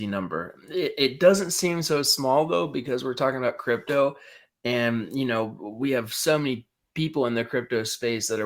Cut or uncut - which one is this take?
uncut